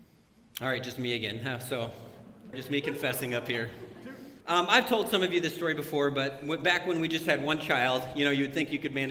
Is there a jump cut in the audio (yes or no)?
yes